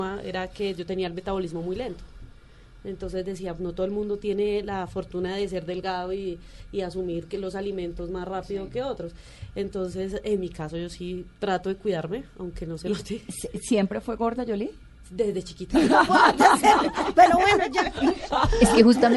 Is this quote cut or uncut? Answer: cut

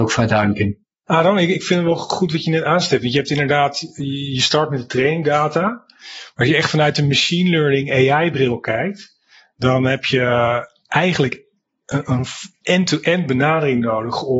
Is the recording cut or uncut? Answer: uncut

